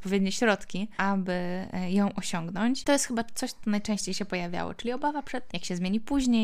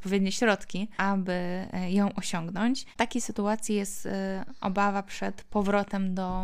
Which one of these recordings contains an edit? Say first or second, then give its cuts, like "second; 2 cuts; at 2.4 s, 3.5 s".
first; 2 cuts; at 2.8 s, 5.5 s